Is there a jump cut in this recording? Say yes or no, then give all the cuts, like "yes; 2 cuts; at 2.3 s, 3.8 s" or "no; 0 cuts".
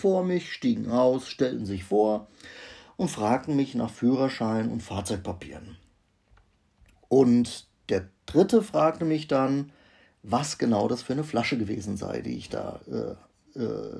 no; 0 cuts